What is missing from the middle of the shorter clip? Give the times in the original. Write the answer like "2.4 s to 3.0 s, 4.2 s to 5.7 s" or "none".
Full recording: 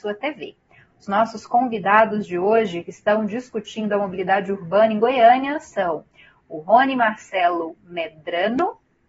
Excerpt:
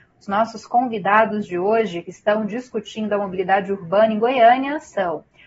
none